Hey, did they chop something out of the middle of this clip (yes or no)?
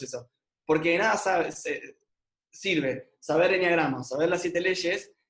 no